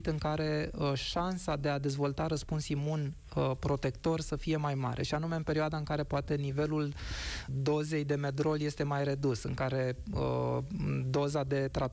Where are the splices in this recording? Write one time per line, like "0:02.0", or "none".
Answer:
0:07.5